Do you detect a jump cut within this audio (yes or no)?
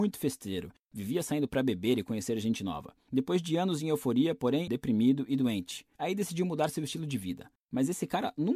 yes